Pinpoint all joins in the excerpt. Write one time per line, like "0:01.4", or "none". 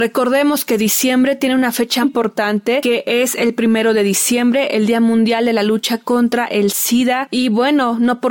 0:02.0

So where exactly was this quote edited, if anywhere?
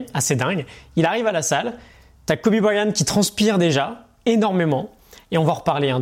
none

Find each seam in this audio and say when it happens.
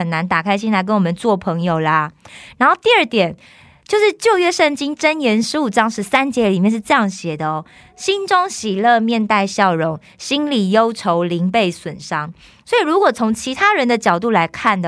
none

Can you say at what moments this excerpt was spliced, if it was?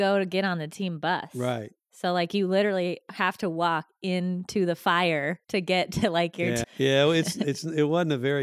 0:05.4
0:06.6

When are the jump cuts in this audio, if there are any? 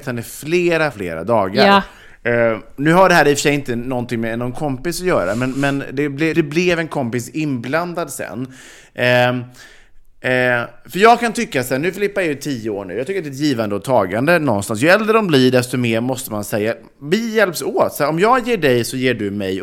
0:00.9
0:06.3

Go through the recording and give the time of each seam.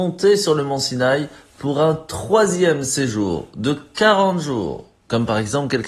0:05.0

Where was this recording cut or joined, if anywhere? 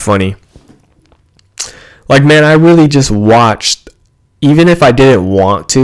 none

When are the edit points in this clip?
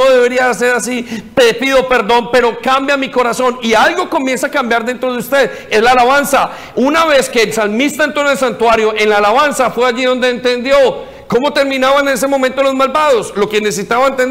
none

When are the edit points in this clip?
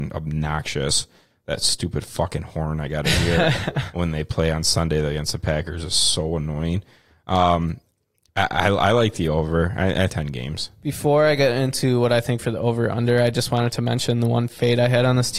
0:10.1

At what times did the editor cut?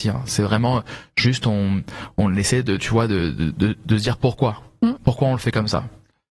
none

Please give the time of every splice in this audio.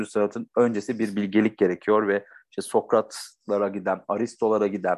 none

